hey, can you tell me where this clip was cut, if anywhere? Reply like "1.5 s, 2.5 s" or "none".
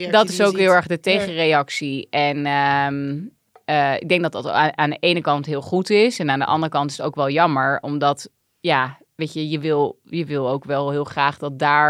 none